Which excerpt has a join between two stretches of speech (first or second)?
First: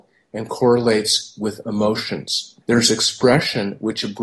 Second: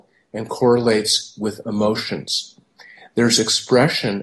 first